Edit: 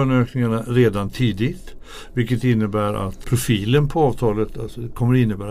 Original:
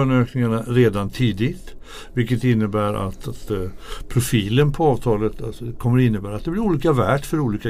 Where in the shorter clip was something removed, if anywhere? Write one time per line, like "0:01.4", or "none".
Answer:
0:03.2